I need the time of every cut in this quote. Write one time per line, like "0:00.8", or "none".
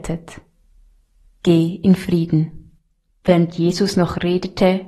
0:03.1